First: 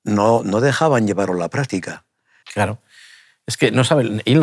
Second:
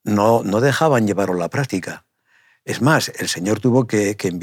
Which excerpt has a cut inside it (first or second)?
first